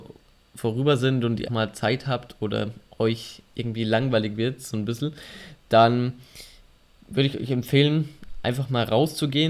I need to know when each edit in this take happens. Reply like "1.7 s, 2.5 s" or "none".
1.5 s